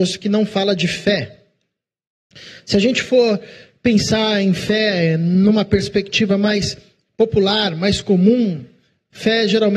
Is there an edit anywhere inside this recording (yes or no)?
no